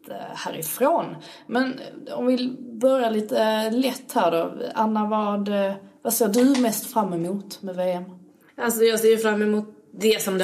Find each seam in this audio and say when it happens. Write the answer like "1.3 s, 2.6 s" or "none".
none